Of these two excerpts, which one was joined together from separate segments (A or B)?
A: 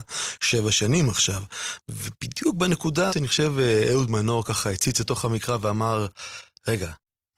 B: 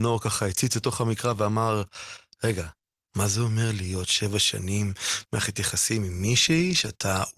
A